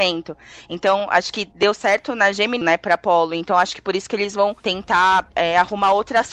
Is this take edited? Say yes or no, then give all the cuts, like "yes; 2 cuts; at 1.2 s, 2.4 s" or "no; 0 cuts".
yes; 1 cut; at 2.6 s